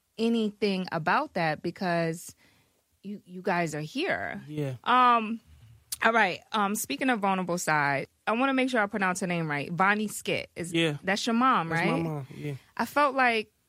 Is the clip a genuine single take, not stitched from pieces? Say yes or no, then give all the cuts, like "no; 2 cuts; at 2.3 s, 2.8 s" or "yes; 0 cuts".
no; 1 cut; at 4.8 s